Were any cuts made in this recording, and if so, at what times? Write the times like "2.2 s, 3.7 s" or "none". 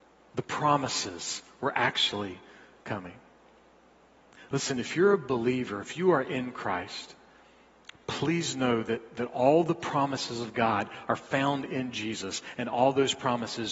none

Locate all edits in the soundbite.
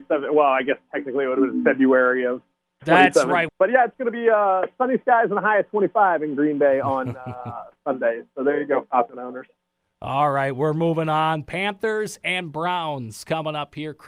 3.5 s

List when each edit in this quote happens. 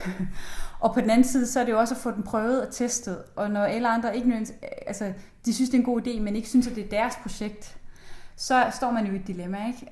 none

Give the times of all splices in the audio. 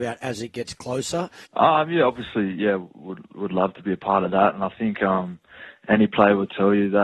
1.5 s

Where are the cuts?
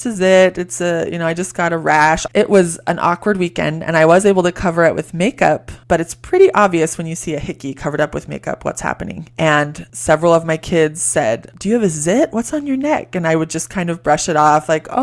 2.3 s, 11.5 s

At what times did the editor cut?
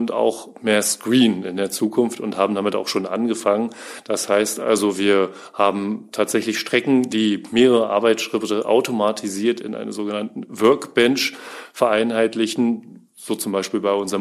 none

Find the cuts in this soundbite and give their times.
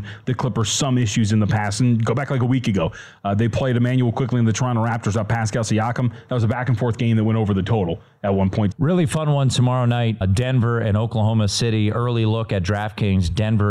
8.7 s, 10.2 s

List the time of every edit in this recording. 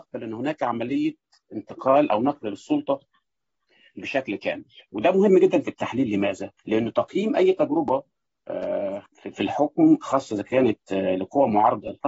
6.6 s, 9.1 s

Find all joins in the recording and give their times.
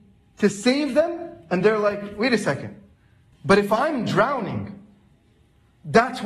3.3 s

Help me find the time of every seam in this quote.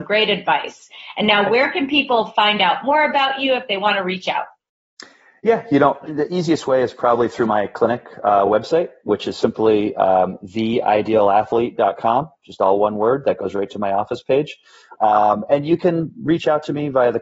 none

